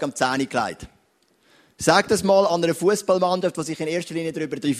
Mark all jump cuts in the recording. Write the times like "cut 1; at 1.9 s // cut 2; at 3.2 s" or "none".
none